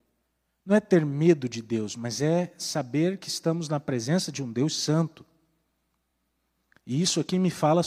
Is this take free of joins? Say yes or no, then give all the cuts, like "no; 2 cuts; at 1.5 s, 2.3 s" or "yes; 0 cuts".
yes; 0 cuts